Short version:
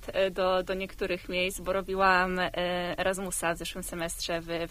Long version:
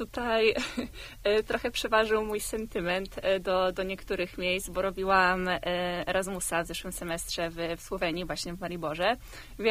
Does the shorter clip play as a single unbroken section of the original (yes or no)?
yes